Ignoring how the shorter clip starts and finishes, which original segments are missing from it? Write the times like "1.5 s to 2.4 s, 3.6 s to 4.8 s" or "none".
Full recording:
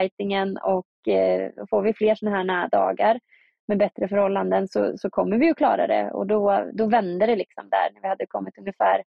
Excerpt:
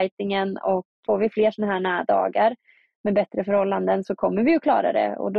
1.0 s to 1.7 s, 4.7 s to 5.0 s